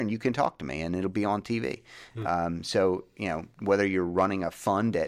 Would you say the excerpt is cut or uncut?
uncut